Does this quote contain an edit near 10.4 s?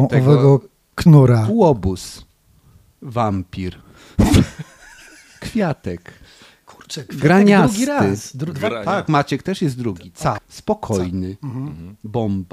yes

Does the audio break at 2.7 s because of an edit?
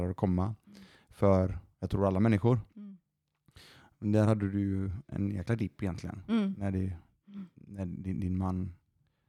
no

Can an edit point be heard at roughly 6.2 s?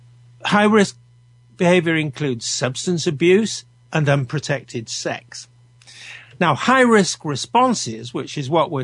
yes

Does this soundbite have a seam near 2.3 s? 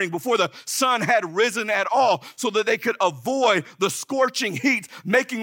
no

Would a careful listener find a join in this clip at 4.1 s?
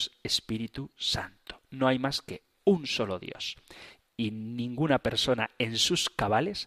no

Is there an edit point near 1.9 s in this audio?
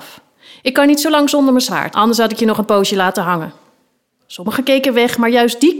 yes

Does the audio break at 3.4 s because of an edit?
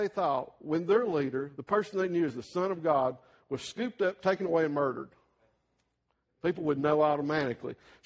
no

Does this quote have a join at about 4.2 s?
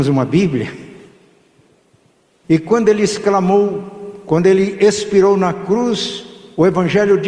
no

